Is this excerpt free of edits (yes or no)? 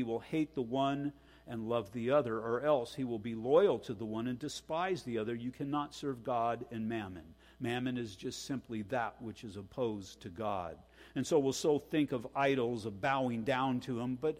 yes